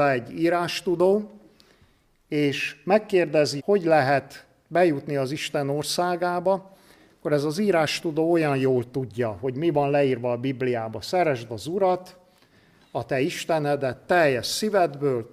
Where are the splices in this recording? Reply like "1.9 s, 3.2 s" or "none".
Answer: 3.6 s